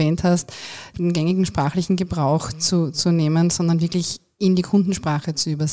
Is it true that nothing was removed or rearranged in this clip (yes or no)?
no